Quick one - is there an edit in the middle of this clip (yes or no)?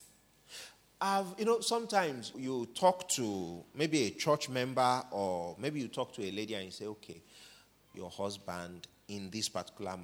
yes